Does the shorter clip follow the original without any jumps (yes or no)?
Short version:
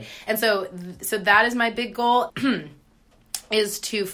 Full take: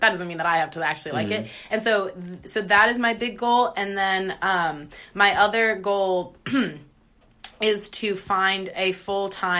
no